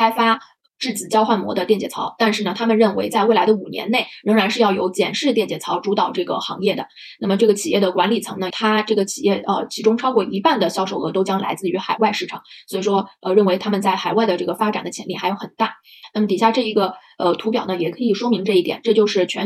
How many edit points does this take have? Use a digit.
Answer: 1